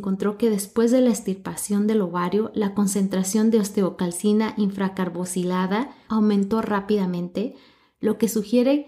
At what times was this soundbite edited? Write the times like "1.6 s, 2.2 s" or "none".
6.1 s